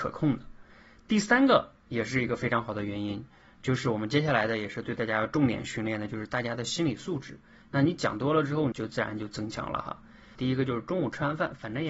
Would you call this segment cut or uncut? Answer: cut